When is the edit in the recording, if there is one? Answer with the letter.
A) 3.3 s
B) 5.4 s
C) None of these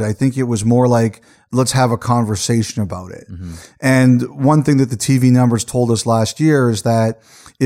C